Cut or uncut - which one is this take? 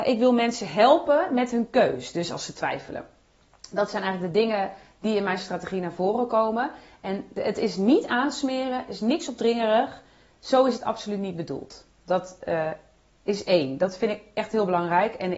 uncut